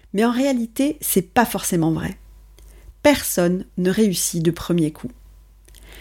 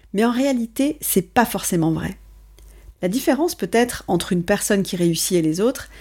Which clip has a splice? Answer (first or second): second